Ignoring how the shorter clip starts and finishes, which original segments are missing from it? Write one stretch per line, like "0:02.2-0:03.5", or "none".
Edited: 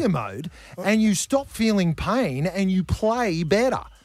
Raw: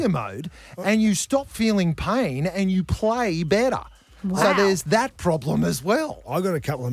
none

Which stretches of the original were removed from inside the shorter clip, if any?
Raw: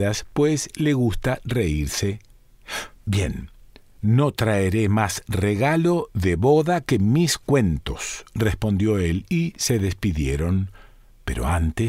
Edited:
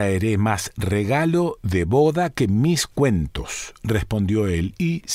none

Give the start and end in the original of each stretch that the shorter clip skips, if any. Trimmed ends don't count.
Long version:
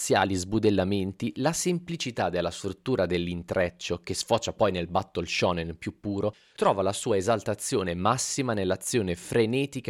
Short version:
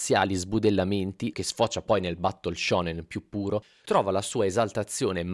0:01.3-0:04.0

